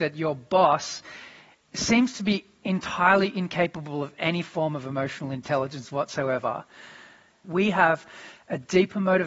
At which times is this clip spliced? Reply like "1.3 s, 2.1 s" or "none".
7.4 s